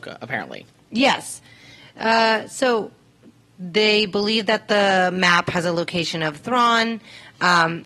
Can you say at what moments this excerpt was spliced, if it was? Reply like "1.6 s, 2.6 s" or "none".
none